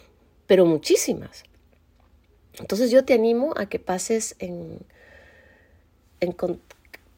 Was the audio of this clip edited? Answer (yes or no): no